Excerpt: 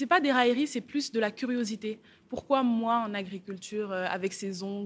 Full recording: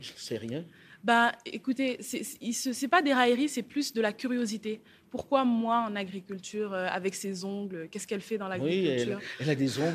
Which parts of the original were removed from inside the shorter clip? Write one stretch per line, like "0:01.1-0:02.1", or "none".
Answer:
none

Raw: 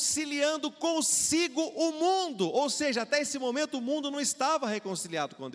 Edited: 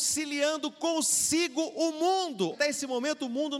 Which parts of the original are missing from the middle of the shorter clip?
0:02.5-0:03.0

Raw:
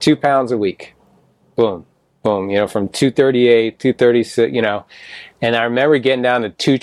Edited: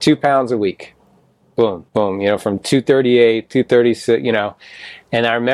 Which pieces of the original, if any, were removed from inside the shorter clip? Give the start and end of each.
0:01.9-0:02.2

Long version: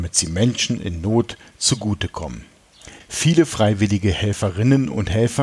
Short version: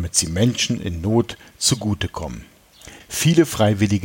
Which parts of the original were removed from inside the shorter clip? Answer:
none

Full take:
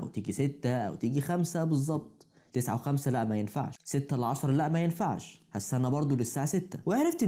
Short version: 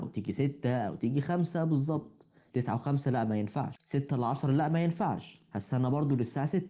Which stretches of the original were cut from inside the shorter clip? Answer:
none

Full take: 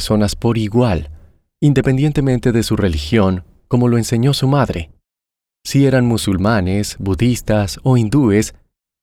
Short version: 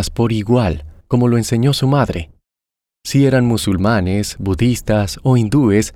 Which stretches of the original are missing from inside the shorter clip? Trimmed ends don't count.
0:01.3-0:03.6

